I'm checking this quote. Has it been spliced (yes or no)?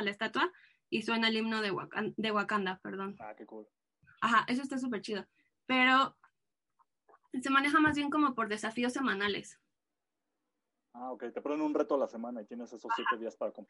no